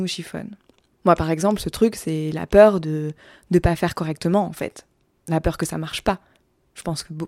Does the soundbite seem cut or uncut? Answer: uncut